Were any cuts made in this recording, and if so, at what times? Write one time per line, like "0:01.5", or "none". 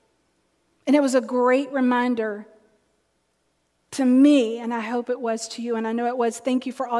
none